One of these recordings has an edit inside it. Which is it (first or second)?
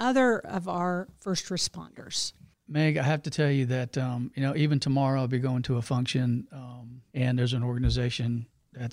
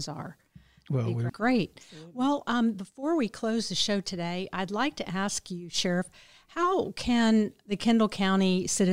second